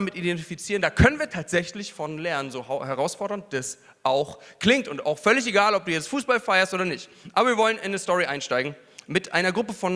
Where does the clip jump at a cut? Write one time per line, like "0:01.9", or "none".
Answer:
none